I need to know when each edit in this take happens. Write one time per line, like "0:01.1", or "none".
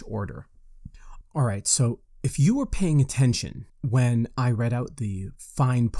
0:01.2
0:03.7